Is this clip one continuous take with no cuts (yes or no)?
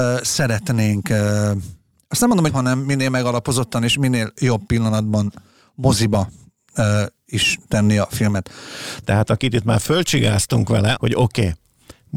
no